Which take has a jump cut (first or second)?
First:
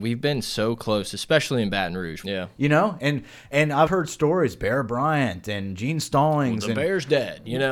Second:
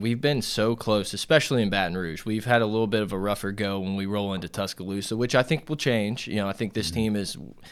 first